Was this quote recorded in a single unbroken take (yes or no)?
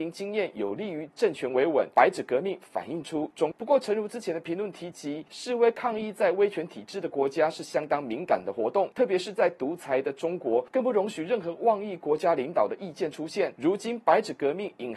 no